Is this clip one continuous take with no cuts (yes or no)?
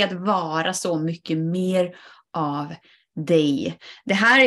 yes